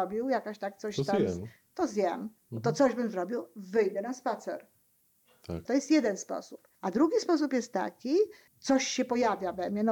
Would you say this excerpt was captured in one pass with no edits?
no; 3 cuts; at 5.7 s, 6.7 s, 8.5 s

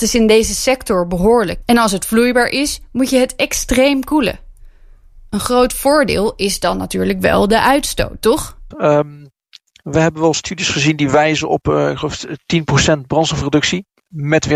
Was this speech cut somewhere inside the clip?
yes; 2 cuts; at 1.6 s, 8.7 s

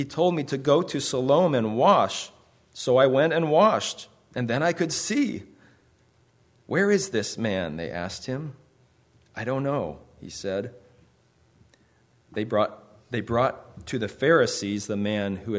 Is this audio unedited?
yes; 0 cuts

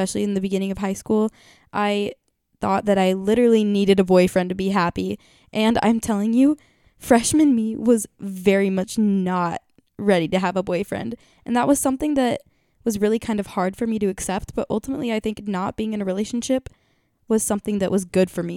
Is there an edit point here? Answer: no; 0 cuts

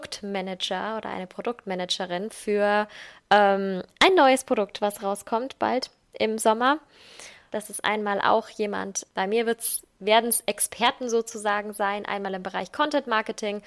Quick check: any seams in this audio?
yes; 2 cuts; at 7.5 s, 9.1 s

